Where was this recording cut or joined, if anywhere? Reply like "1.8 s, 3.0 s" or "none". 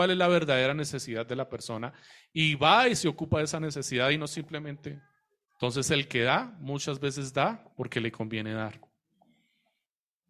5.5 s, 7.7 s